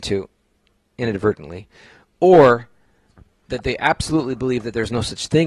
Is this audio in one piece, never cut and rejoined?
yes; 0 cuts

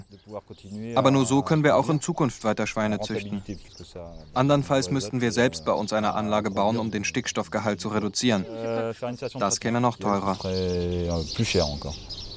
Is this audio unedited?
yes; 0 cuts

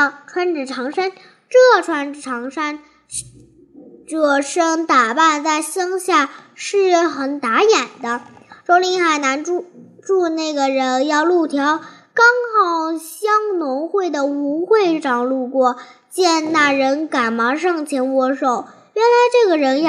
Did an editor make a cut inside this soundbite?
no; 0 cuts

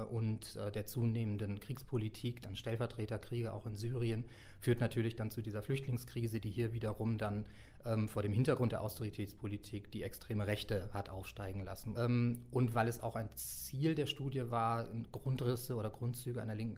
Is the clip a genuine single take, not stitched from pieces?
no; 1 cut; at 11.9 s

